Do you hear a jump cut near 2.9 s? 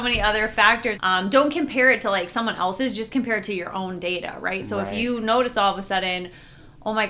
no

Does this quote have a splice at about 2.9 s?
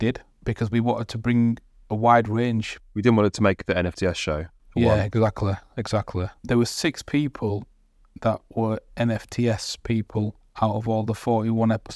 no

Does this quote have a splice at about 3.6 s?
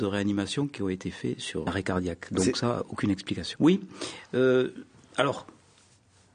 yes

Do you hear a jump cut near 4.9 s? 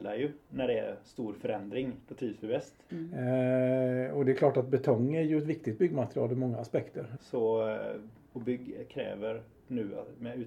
no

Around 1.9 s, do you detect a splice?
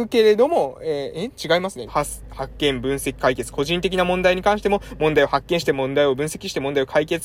yes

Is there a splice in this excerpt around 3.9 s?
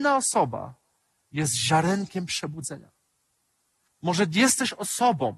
yes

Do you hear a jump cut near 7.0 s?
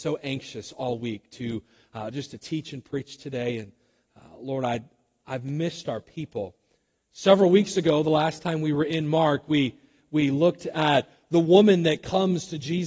yes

